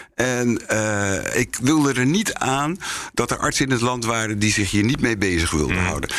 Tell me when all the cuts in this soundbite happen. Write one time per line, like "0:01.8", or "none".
0:01.3